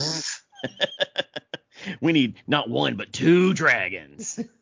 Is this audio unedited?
yes; 0 cuts

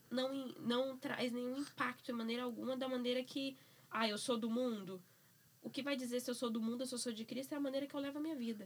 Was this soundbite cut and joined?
no; 0 cuts

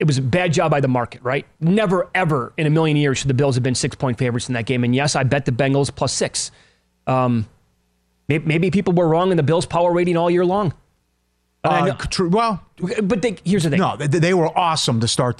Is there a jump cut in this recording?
no; 0 cuts

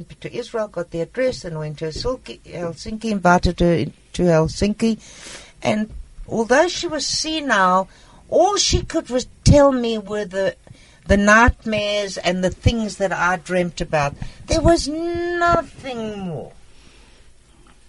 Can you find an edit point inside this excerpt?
no; 0 cuts

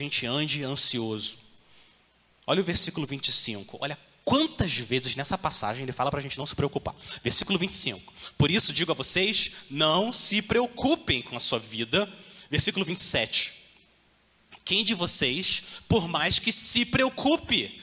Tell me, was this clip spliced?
no; 0 cuts

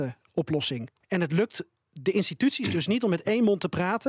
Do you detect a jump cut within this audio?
yes; 1 cut; at 1.0 s

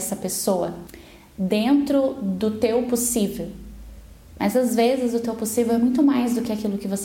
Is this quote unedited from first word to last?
yes; 0 cuts

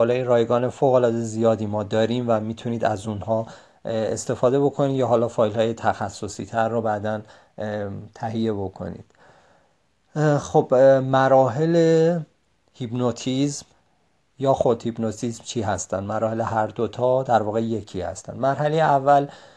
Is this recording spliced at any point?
no; 0 cuts

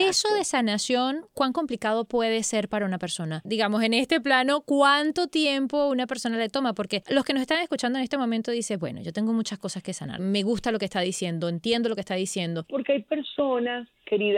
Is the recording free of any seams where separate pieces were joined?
no; 2 cuts; at 10.2 s, 12.7 s

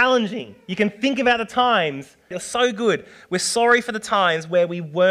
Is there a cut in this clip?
yes; 1 cut; at 2.3 s

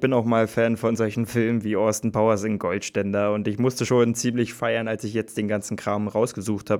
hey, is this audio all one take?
yes; 0 cuts

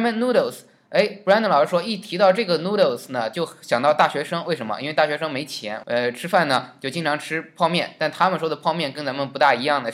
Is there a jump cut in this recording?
yes; 1 cut; at 5.8 s

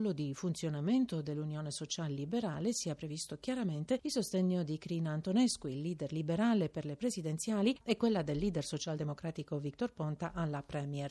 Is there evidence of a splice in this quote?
no; 0 cuts

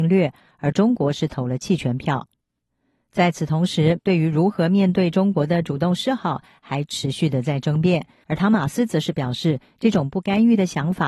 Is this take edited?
yes; 2 cuts; at 4.0 s, 8.2 s

